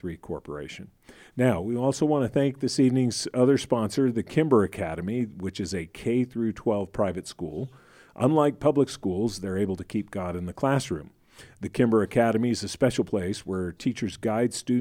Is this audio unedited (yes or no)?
yes